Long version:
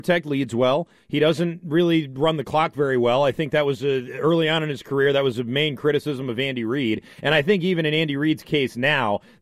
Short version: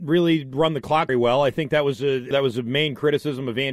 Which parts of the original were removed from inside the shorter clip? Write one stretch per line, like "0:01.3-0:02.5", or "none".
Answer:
0:02.7-0:02.9
0:04.1-0:05.1